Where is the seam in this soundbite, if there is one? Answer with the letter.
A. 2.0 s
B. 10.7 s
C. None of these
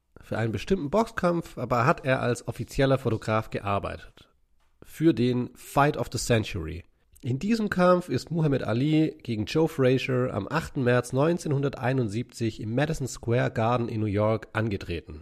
C